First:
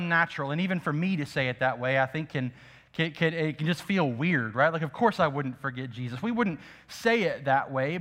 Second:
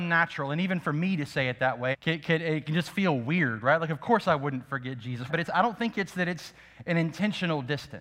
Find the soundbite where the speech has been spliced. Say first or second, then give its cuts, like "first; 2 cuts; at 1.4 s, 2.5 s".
second; 2 cuts; at 1.9 s, 5.3 s